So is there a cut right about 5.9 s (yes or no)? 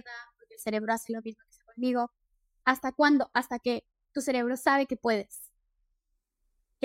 no